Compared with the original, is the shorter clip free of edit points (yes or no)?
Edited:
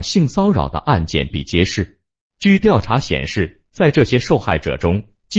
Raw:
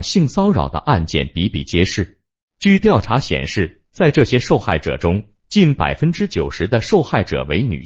no